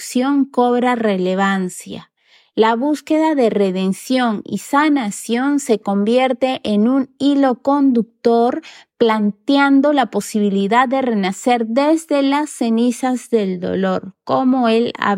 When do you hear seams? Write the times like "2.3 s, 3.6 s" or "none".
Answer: none